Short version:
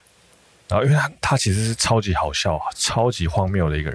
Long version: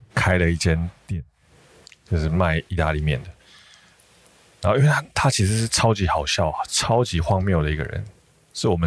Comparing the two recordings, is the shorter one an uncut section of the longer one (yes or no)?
yes